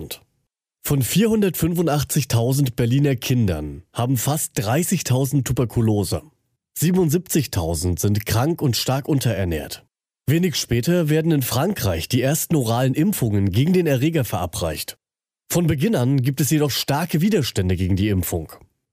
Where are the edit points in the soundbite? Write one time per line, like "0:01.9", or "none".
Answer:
none